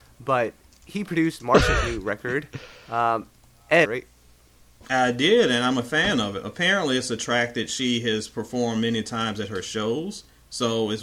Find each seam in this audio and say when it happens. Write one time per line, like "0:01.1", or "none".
0:03.9

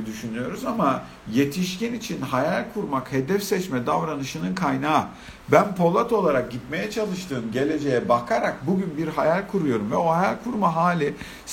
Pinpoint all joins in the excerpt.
none

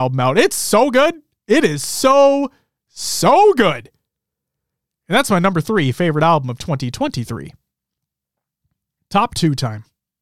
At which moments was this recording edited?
none

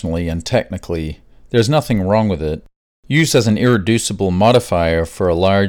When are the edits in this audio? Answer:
none

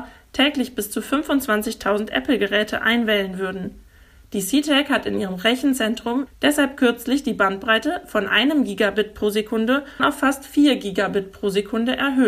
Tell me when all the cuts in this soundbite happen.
0:06.3
0:10.0

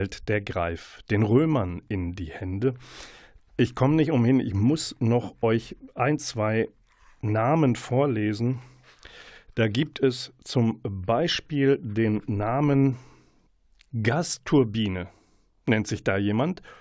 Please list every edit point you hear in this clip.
none

